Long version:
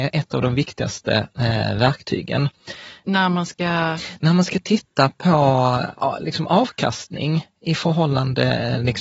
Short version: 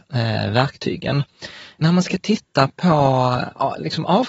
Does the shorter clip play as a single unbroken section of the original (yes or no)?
no